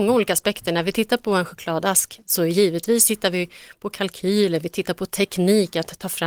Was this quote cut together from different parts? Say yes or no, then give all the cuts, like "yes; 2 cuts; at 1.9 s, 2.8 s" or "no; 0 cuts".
no; 0 cuts